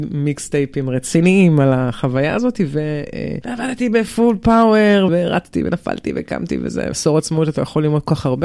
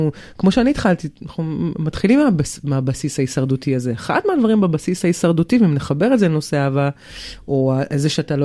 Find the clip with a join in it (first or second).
first